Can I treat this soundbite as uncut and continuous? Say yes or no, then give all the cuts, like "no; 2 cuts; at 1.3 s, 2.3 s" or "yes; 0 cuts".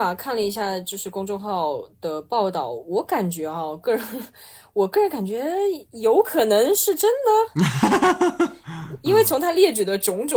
yes; 0 cuts